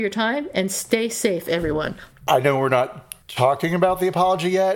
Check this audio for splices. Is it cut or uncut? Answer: cut